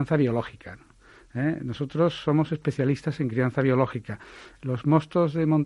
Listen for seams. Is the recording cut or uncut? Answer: uncut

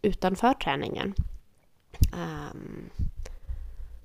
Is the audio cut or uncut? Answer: cut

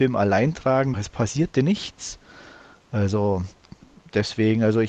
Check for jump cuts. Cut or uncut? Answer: cut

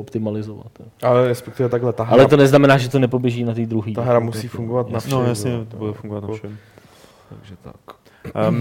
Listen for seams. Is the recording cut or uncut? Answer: uncut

